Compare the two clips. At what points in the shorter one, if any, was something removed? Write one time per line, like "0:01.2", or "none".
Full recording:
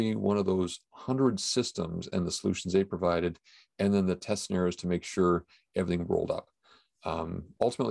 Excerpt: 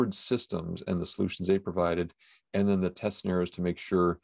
none